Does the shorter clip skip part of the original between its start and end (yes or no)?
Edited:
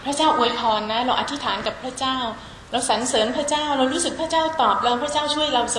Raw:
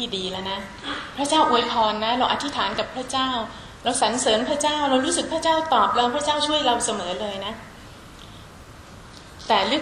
no